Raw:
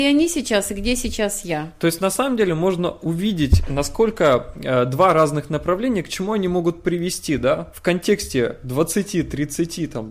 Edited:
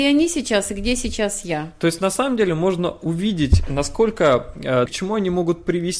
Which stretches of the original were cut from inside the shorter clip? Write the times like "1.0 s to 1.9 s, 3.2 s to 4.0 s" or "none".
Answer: 4.9 s to 6.0 s